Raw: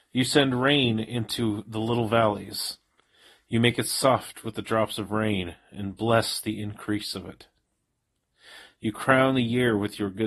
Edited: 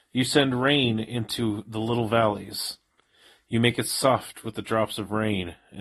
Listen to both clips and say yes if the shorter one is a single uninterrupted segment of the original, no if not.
yes